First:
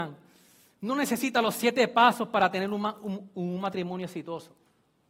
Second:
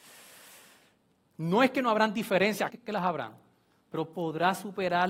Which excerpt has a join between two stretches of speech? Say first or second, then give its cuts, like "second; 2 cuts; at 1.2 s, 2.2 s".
second; 1 cut; at 2.7 s